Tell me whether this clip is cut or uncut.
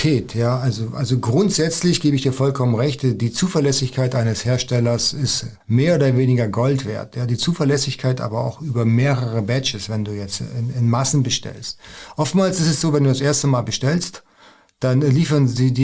cut